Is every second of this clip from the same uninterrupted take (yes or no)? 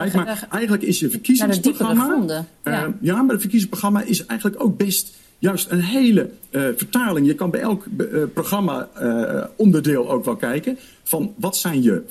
yes